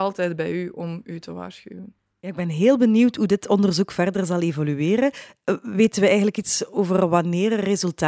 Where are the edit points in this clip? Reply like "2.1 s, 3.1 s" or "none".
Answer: none